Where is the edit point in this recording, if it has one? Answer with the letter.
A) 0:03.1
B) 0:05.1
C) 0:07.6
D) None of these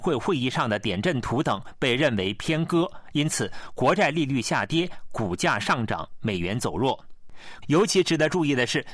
C